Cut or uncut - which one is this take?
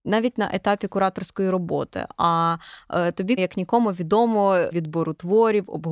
cut